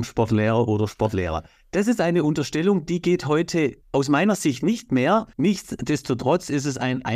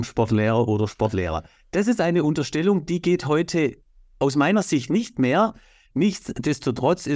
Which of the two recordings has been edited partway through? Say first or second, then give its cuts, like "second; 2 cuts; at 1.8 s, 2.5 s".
first; 2 cuts; at 3.8 s, 5.3 s